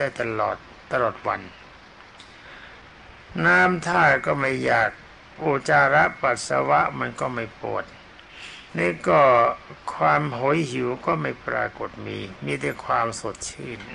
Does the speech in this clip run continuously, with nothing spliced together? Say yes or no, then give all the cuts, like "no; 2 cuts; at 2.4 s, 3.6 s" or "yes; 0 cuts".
no; 2 cuts; at 5.6 s, 8.7 s